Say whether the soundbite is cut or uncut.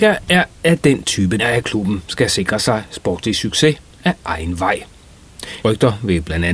cut